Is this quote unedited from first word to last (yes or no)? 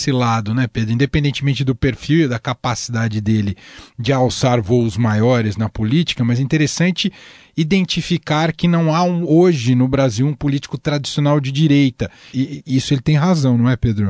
no